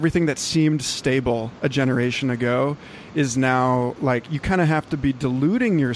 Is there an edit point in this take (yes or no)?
no